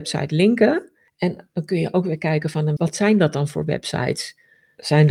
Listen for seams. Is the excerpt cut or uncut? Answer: cut